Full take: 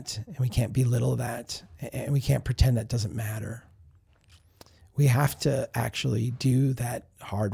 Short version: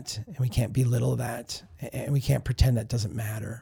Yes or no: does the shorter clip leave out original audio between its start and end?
no